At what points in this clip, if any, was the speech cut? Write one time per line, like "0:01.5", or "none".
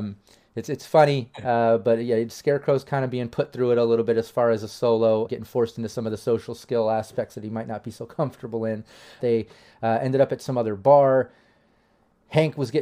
0:05.3
0:09.2